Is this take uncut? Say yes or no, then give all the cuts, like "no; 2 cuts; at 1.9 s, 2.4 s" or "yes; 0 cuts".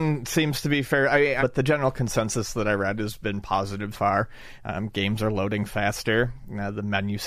no; 2 cuts; at 1.4 s, 3.9 s